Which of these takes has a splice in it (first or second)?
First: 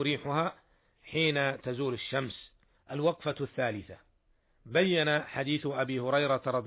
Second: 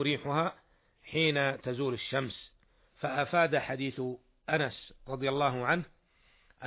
first